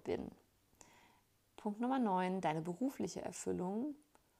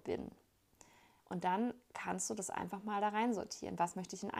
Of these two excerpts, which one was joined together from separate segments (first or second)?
second